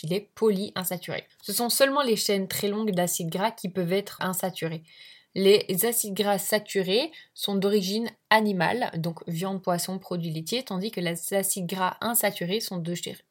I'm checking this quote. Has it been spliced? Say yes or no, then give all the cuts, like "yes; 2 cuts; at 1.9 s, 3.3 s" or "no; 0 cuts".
yes; 2 cuts; at 1.3 s, 4.2 s